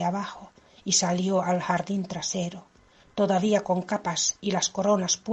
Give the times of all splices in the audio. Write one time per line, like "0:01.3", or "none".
0:03.0